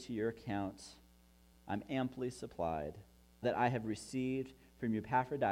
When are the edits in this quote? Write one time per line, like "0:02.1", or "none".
0:01.5
0:03.4